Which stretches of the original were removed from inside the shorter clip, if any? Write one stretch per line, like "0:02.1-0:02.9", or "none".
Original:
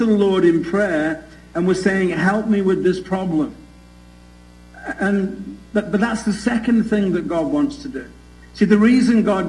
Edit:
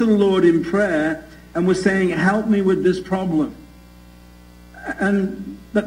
none